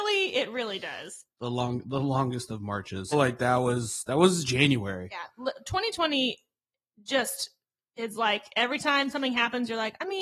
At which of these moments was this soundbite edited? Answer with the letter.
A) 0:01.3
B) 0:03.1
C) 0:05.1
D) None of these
B